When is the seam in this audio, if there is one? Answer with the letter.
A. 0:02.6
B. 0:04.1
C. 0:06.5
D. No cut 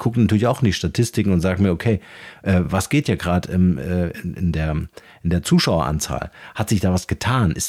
D